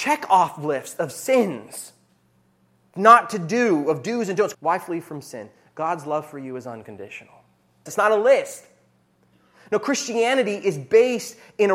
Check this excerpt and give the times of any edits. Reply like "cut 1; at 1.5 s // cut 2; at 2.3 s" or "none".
cut 1; at 4.5 s // cut 2; at 7.9 s